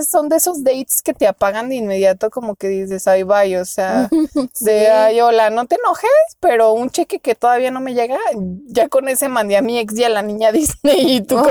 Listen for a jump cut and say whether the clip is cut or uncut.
uncut